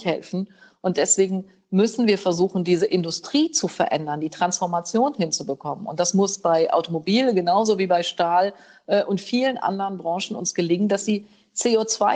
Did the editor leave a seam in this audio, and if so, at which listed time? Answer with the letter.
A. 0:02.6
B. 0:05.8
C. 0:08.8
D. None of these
D